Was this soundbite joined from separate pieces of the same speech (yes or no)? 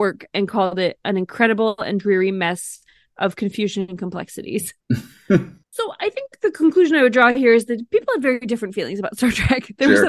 yes